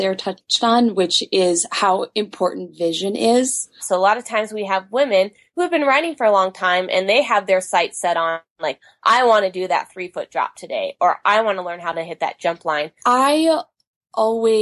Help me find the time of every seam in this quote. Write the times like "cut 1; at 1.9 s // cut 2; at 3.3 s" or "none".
cut 1; at 3.8 s // cut 2; at 13.0 s